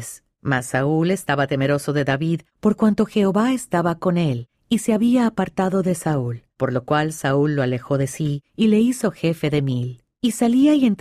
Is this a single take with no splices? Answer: yes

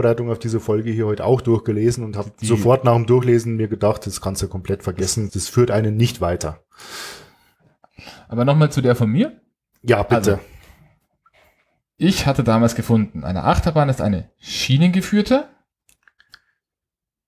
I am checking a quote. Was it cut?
yes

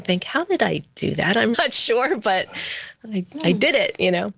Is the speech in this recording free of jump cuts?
no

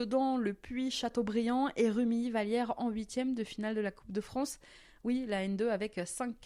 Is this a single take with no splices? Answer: yes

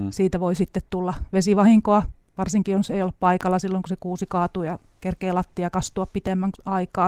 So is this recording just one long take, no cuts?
yes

